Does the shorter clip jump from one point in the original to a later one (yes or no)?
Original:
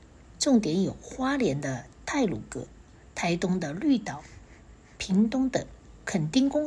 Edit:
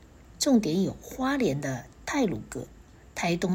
no